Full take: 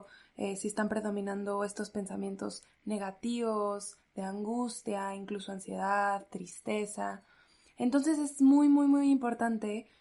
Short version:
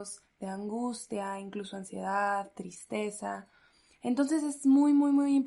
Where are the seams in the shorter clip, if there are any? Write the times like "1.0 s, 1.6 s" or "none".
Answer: none